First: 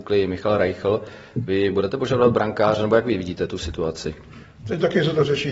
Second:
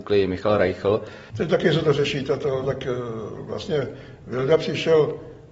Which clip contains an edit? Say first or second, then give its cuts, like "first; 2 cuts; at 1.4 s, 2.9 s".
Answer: second; 2 cuts; at 1.3 s, 2.6 s